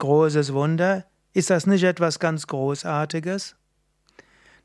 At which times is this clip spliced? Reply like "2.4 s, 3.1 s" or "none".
none